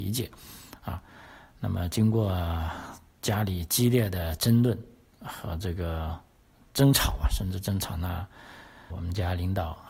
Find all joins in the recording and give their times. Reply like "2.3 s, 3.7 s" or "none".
8.9 s